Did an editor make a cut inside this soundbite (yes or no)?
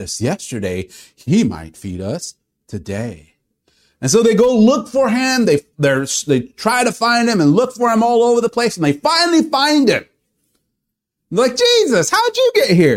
no